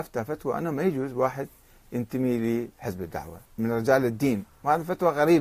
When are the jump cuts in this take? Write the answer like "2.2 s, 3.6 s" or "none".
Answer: 3.5 s